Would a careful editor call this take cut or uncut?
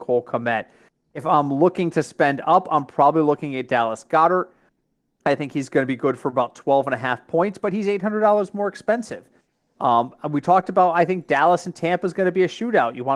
uncut